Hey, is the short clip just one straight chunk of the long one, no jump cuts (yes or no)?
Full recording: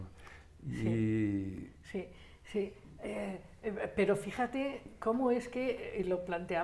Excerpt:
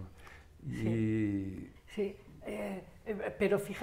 no